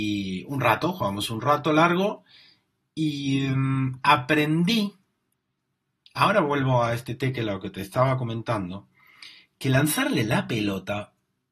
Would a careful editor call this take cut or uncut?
uncut